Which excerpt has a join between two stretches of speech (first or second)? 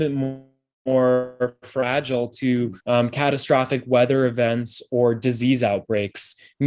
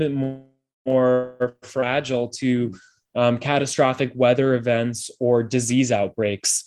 first